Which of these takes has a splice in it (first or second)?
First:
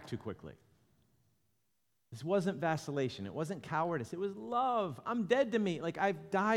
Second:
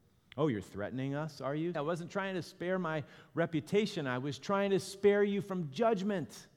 second